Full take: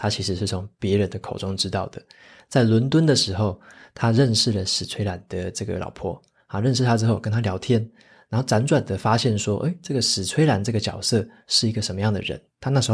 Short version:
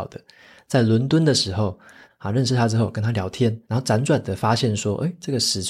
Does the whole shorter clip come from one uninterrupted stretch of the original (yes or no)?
no